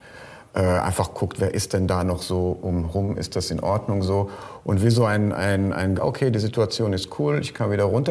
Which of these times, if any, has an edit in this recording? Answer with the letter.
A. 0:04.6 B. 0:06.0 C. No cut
B